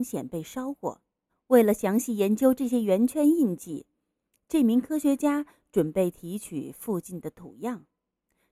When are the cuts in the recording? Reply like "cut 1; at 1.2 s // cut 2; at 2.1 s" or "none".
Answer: cut 1; at 1.3 s